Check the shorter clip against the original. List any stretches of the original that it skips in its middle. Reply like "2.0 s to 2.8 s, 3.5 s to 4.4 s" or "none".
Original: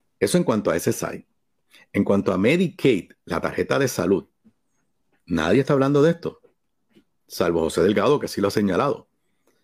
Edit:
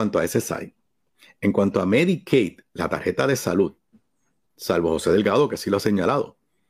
5.0 s to 7.2 s